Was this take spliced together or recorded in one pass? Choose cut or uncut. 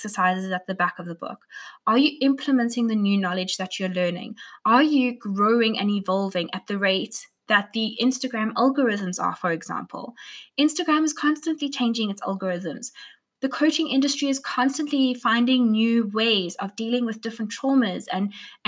cut